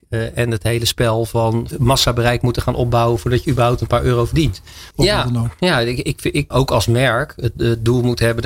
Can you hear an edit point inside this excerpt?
yes; 3 cuts; at 1.7 s, 4.9 s, 6.5 s

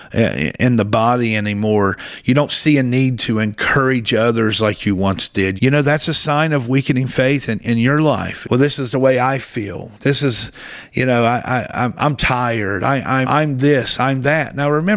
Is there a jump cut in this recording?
yes; 3 cuts; at 5.6 s, 8.4 s, 13.2 s

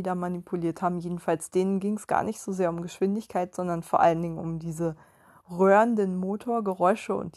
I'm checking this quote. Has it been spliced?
no; 0 cuts

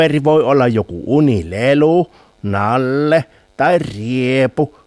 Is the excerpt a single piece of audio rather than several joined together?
yes; 0 cuts

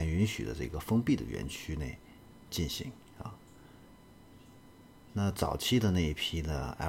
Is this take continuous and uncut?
yes; 0 cuts

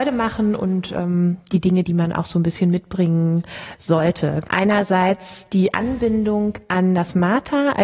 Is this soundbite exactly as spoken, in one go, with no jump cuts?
no; 1 cut; at 4.4 s

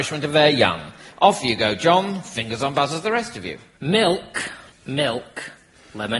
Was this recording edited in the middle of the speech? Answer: no; 0 cuts

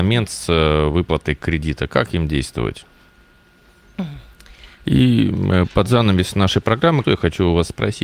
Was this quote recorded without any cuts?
no; 2 cuts; at 4.8 s, 7.0 s

